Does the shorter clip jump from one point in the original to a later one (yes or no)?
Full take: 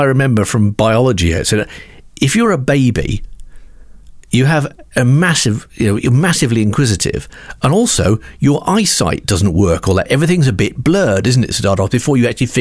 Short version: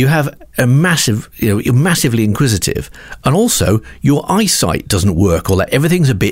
no